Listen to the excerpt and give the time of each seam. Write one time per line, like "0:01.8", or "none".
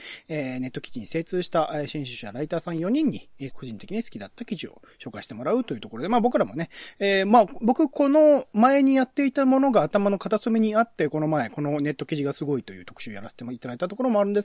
0:03.5